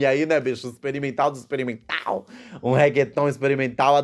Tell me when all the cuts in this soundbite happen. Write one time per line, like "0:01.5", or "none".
none